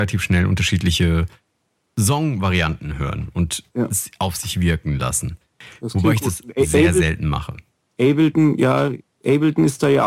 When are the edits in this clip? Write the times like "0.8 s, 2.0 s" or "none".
none